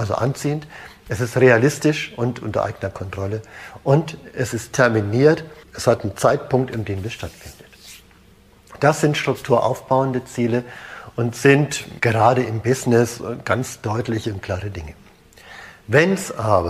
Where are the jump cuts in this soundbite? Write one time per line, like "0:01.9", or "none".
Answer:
0:05.6
0:12.0